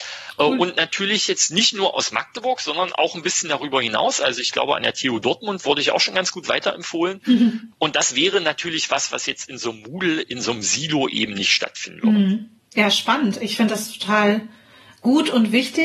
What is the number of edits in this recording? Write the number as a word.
zero